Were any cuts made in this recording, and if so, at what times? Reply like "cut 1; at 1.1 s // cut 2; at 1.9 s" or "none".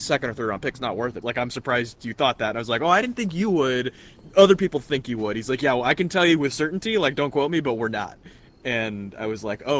cut 1; at 1.2 s